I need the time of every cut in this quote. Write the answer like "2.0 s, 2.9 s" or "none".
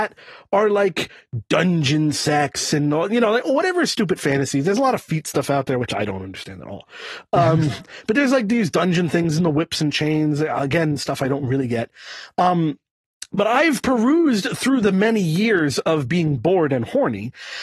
none